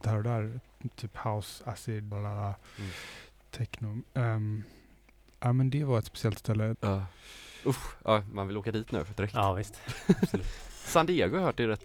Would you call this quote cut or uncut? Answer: cut